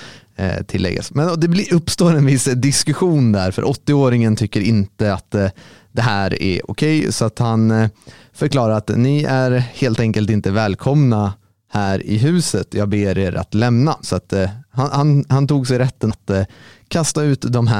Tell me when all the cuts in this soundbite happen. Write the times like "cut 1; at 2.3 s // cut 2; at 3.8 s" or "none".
cut 1; at 14.0 s // cut 2; at 16.1 s